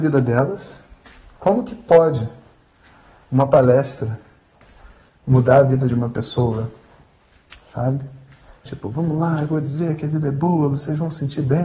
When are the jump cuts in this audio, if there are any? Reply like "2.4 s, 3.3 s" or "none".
8.7 s